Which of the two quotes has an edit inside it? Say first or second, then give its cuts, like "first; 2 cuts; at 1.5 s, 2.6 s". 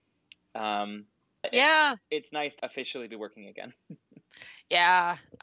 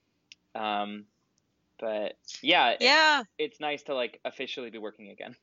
first; 2 cuts; at 1.4 s, 2.6 s